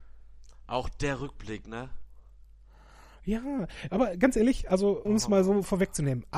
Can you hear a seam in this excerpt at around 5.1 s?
yes; 1 cut; at 5.1 s

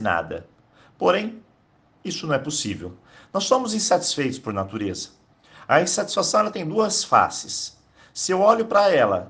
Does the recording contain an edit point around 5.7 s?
no; 1 cut; at 3.2 s

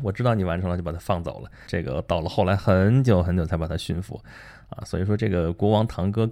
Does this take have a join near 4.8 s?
no; 1 cut; at 1.7 s

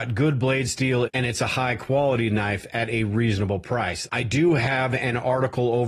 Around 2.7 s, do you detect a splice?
no; 2 cuts; at 1.1 s, 4.1 s

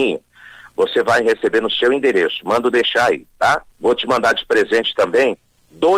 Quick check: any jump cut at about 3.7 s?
yes; 1 cut; at 3.7 s

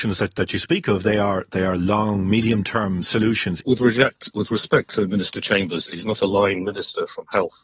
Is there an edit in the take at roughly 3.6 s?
yes; 2 cuts; at 3.6 s, 5.9 s

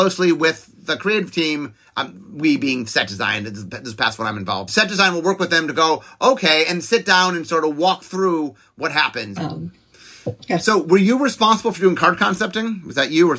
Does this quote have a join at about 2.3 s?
no; 2 cuts; at 4.7 s, 9.4 s

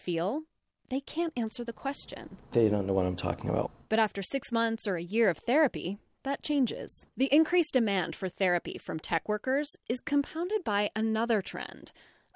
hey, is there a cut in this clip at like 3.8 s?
no; 1 cut; at 7.1 s

